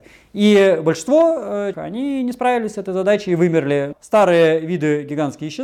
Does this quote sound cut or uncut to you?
cut